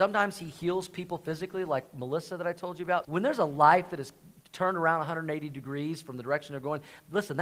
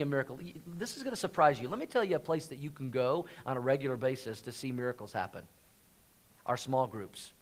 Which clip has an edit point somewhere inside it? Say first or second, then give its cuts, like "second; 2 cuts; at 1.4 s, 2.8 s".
first; 1 cut; at 3.0 s